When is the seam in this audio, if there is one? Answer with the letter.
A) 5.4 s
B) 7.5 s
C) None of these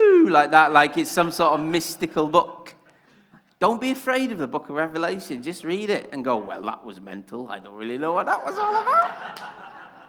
C